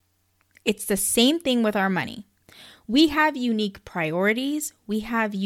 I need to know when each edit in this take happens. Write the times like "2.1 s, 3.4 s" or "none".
none